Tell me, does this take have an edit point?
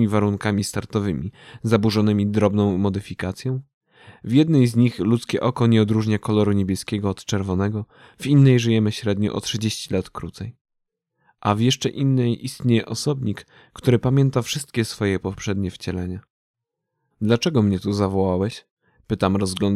yes; 1 cut; at 17.1 s

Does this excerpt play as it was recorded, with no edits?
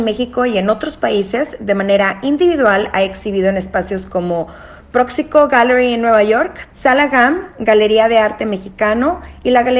no; 1 cut; at 6.7 s

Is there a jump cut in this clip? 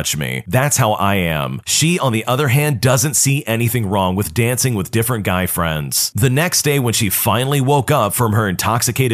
no; 0 cuts

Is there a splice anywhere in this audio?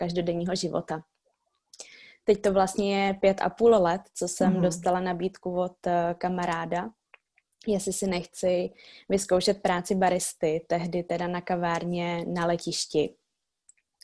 no; 0 cuts

